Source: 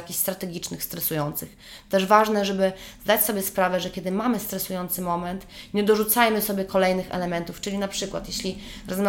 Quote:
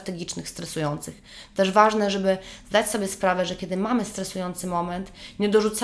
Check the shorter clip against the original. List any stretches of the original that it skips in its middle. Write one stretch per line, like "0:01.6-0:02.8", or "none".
none